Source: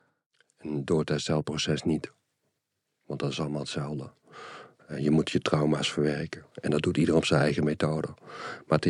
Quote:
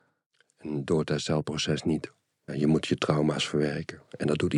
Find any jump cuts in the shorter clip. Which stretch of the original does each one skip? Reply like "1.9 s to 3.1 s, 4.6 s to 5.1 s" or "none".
2.5 s to 4.9 s